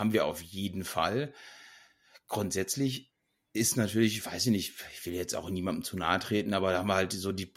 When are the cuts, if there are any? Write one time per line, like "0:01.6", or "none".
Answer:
none